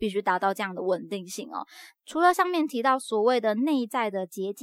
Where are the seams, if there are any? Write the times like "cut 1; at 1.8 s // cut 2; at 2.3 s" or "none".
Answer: none